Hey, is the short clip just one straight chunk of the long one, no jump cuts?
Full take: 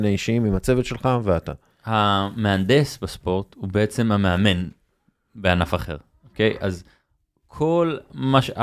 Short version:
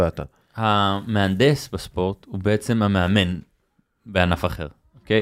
yes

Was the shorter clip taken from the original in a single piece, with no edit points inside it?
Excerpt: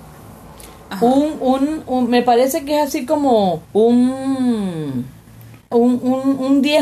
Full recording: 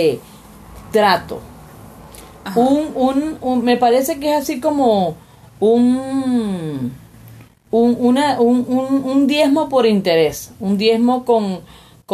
no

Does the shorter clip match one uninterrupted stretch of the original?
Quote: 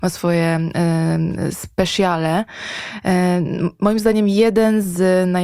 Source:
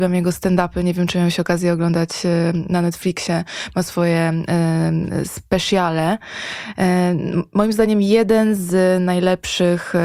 yes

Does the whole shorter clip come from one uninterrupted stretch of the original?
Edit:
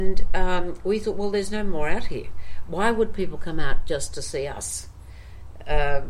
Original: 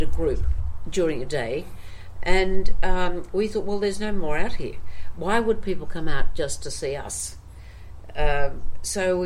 yes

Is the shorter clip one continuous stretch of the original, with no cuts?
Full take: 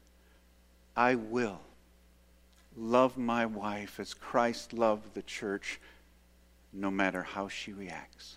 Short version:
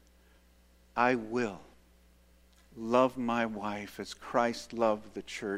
yes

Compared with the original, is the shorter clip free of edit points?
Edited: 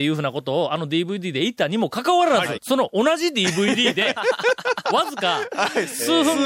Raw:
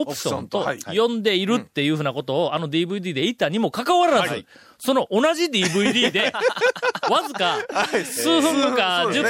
no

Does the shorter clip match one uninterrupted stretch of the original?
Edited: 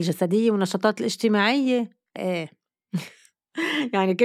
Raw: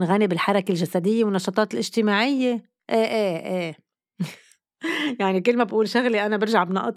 no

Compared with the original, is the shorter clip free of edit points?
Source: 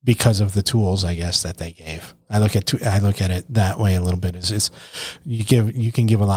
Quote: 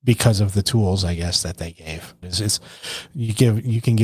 no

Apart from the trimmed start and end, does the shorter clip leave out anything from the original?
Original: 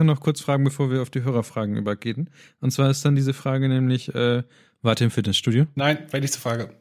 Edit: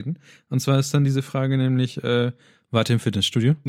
no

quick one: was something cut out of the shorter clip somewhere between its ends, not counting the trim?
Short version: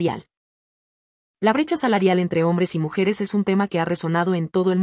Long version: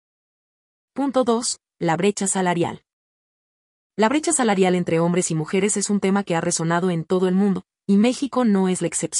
no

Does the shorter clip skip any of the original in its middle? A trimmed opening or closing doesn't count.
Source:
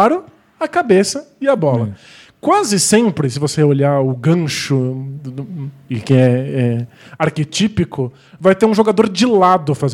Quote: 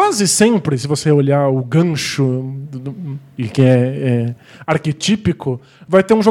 no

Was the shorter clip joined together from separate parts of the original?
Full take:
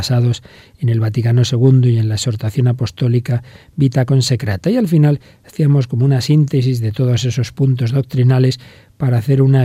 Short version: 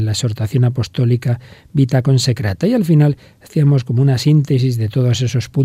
no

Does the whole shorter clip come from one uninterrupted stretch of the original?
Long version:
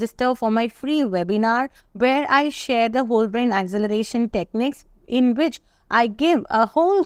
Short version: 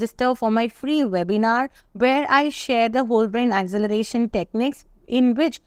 yes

